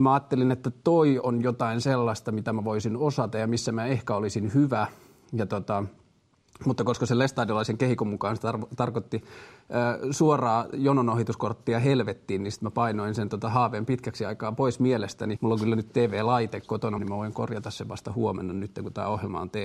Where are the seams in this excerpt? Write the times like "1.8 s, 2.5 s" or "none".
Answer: 15.4 s, 17.0 s